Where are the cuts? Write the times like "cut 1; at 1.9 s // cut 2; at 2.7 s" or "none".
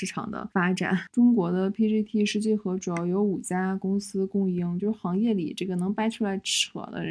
none